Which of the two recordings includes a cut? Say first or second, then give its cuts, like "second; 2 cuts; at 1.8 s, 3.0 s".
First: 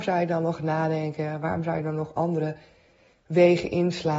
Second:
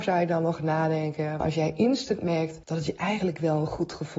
second; 2 cuts; at 1.4 s, 2.6 s